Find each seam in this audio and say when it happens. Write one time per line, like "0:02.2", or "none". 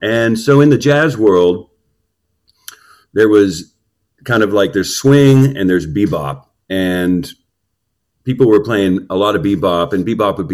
none

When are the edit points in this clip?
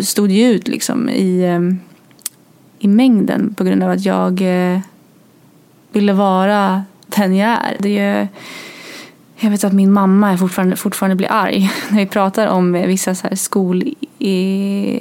none

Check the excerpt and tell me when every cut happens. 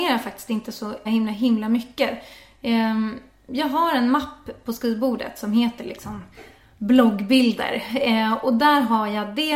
0:01.1

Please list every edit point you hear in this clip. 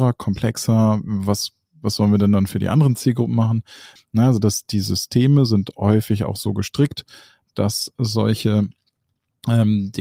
0:04.0

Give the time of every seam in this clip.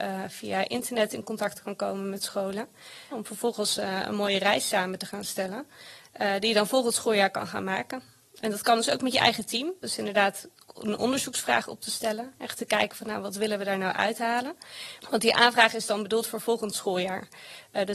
0:03.1
0:09.8
0:15.0

